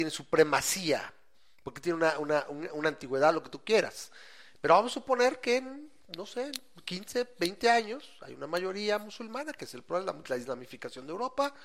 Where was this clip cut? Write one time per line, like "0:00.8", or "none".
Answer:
none